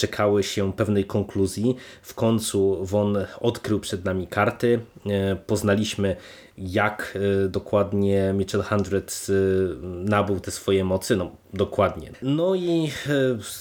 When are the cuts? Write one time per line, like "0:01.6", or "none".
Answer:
0:12.1